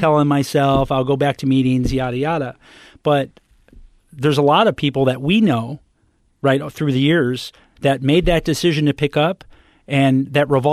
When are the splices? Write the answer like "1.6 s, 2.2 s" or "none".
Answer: none